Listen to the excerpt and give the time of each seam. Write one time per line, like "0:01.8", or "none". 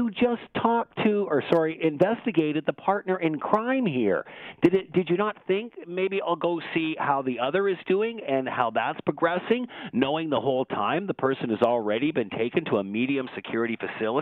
none